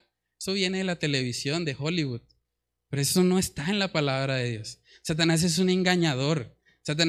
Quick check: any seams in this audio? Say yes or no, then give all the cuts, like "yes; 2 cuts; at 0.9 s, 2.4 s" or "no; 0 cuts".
no; 0 cuts